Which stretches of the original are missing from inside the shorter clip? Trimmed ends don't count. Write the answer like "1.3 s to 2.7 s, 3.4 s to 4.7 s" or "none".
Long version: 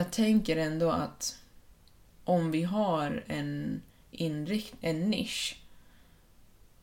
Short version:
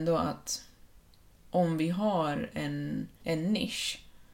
3.9 s to 4.8 s